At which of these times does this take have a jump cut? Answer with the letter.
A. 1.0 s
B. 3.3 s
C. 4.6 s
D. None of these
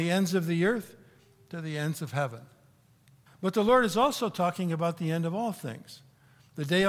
B